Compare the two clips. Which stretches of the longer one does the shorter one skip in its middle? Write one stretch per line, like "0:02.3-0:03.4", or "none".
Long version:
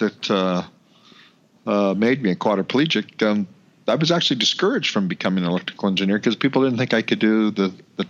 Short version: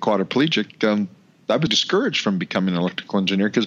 0:04.1-0:04.4